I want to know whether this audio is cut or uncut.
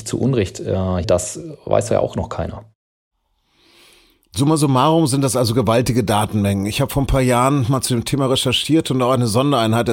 cut